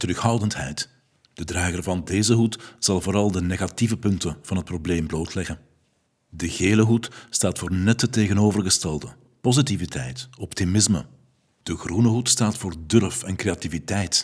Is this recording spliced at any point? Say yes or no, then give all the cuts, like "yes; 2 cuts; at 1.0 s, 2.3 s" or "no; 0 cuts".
no; 0 cuts